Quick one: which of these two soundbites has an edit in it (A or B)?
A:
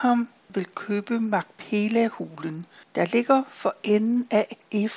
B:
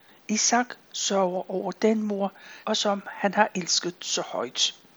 B